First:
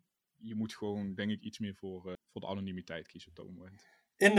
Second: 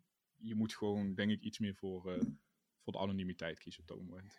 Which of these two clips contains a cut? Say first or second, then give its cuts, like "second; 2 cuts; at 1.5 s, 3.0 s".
first; 1 cut; at 2.1 s